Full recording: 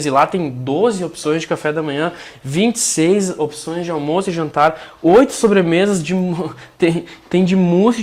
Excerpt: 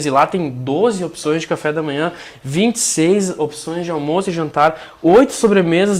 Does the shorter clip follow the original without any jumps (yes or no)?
yes